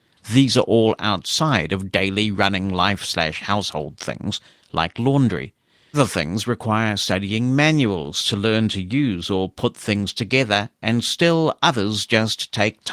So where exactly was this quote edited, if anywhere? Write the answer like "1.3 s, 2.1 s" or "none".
5.9 s